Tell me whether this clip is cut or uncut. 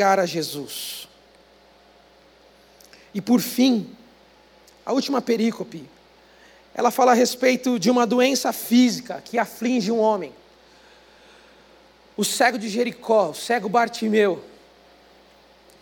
uncut